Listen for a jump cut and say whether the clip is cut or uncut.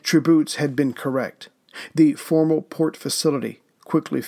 uncut